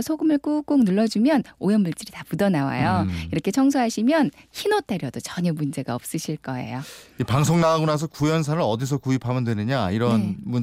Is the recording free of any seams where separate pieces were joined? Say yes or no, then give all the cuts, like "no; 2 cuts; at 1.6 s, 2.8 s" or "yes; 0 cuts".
yes; 0 cuts